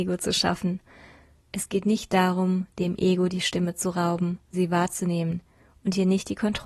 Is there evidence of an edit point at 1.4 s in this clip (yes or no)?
yes